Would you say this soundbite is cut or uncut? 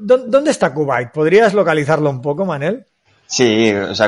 uncut